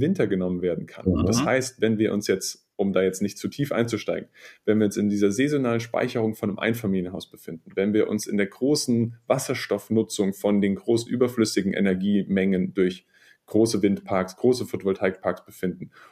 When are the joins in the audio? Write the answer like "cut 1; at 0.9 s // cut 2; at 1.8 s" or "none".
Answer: none